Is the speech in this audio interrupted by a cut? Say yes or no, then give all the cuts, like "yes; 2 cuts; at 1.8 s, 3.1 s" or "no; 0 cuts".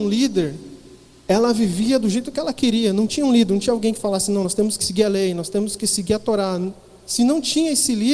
no; 0 cuts